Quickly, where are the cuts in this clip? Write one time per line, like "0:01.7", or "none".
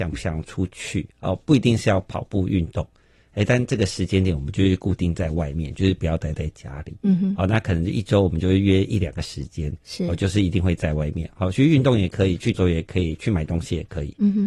0:12.5